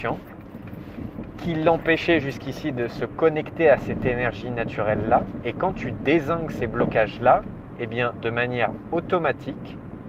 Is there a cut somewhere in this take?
no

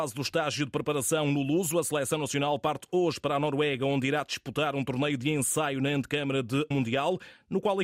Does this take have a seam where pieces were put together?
yes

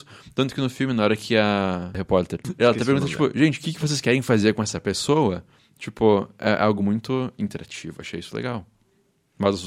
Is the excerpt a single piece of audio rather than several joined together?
yes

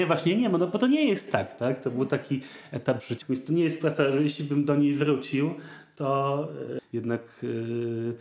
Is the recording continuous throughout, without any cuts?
no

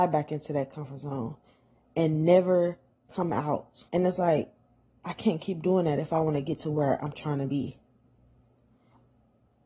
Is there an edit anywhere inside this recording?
yes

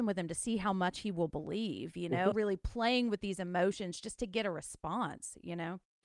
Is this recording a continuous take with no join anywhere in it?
no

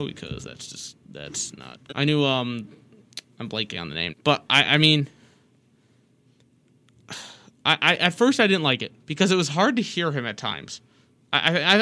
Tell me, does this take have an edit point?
yes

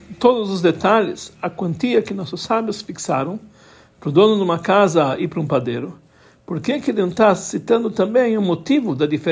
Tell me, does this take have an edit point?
no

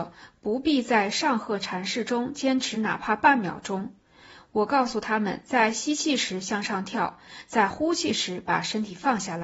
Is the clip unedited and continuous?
yes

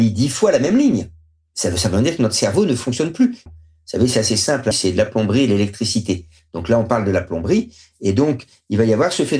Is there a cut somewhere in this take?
yes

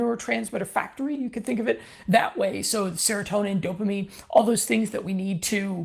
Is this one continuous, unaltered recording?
yes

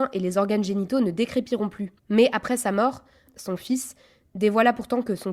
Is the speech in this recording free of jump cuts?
no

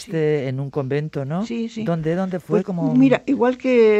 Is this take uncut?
yes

